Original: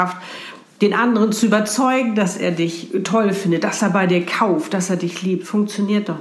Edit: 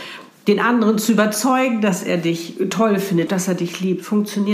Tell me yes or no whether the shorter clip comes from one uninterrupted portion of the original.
no